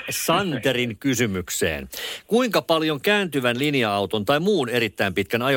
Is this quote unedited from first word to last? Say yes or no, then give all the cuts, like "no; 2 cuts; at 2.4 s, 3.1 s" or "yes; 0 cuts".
yes; 0 cuts